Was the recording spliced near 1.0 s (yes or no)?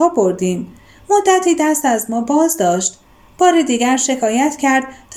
no